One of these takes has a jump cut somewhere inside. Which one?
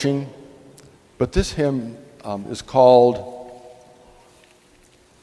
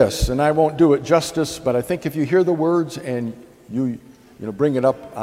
first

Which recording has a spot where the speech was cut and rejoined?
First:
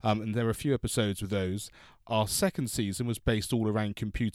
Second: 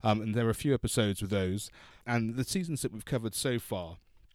second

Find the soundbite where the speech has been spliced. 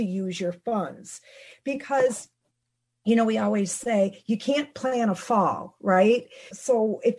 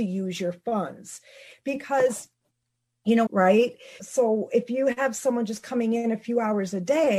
second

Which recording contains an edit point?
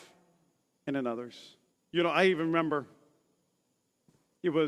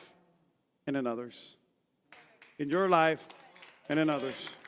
first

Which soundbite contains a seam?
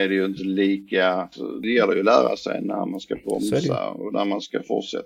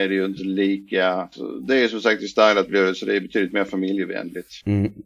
first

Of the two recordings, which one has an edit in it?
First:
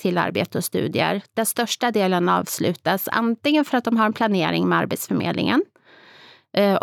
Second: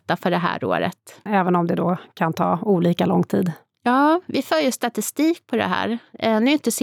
second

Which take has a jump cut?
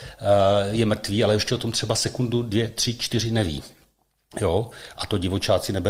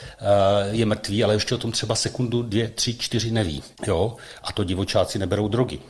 second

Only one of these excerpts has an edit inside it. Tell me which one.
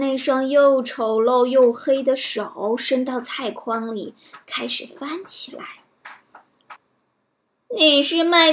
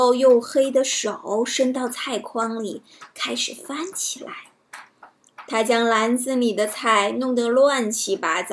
first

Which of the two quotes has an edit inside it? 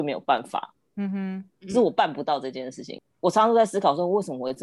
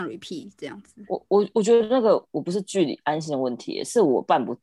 first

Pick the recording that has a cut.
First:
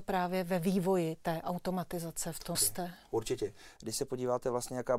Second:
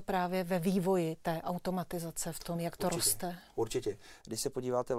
first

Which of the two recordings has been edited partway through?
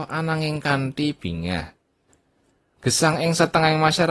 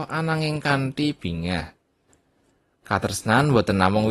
first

